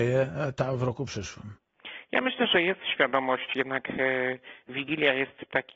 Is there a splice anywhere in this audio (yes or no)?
no